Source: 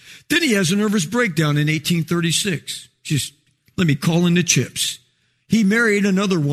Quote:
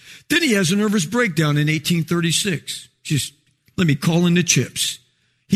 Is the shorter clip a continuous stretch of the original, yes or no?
yes